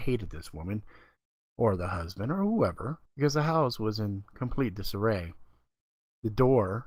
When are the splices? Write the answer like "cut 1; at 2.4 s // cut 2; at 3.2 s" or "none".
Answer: cut 1; at 3.1 s